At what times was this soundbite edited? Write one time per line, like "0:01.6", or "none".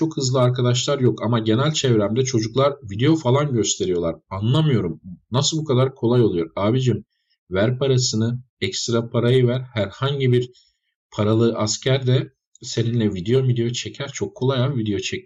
none